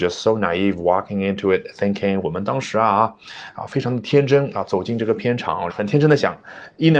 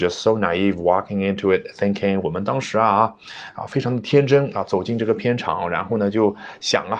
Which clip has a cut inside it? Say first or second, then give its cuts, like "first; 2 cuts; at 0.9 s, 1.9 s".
first; 1 cut; at 5.7 s